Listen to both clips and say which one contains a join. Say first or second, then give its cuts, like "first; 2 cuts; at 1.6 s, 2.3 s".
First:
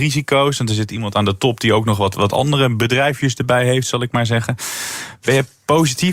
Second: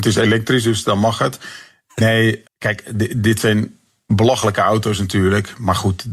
second; 1 cut; at 2.5 s